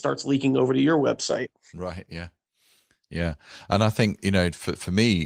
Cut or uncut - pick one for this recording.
uncut